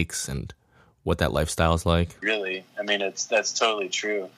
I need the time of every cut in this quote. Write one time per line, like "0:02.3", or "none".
0:02.2